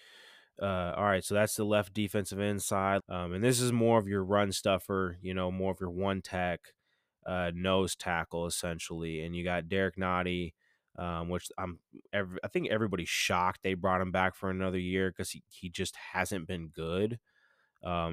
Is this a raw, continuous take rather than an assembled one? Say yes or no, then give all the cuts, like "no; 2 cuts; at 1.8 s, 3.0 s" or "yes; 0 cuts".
no; 1 cut; at 3.0 s